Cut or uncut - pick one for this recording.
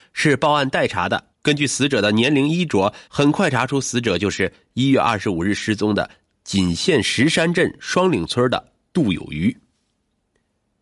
cut